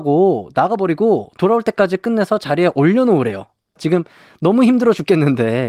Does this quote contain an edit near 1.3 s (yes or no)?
no